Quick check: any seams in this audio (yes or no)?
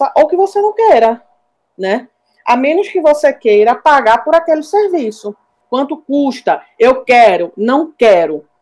yes